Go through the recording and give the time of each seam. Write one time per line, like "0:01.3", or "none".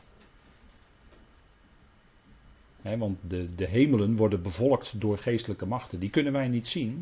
none